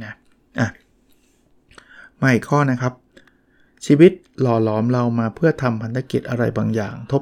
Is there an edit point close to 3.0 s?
no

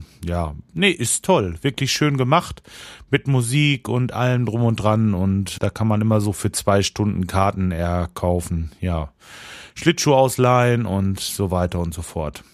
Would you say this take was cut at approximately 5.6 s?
yes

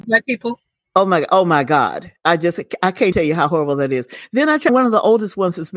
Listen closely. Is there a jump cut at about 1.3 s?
no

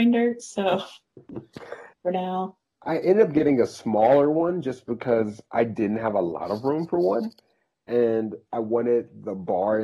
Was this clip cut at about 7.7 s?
no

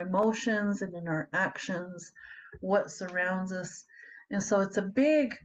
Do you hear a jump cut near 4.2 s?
no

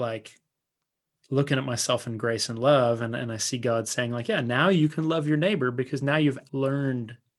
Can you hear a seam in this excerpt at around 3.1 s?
no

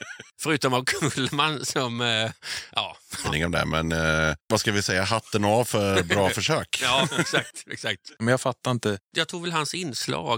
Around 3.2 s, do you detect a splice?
yes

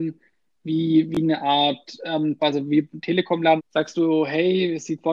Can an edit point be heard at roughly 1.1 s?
no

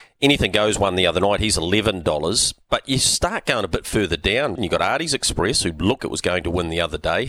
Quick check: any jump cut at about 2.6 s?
no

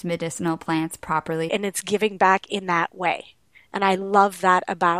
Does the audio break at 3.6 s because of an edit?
no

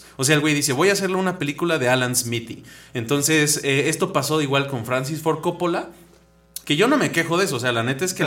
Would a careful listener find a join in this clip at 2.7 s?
no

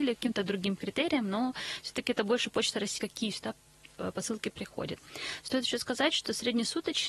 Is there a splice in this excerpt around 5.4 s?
no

